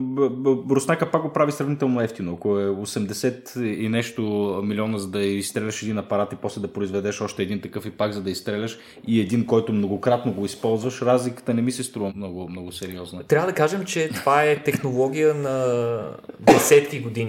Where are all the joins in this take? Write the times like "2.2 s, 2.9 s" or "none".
12.1 s